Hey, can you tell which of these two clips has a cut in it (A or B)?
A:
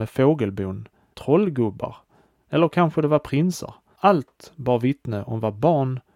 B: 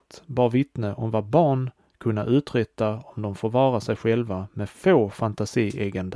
A